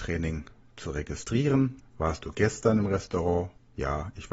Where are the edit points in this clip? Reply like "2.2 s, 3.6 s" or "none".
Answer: 1.8 s